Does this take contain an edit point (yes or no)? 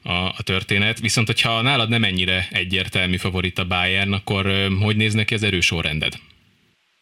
no